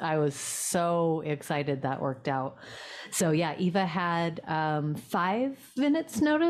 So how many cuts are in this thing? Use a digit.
0